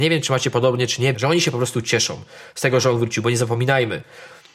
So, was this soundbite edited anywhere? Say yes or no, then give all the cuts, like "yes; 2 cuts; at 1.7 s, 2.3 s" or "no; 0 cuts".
yes; 1 cut; at 1.1 s